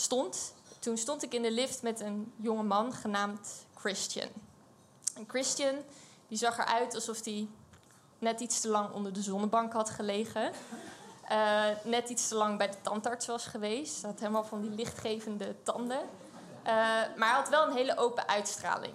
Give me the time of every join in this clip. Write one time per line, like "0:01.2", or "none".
none